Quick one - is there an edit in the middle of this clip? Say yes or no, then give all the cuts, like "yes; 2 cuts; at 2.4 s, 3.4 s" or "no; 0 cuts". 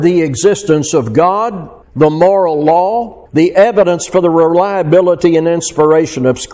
yes; 2 cuts; at 1.8 s, 3.3 s